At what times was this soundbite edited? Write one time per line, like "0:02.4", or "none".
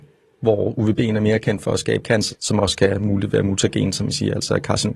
0:02.3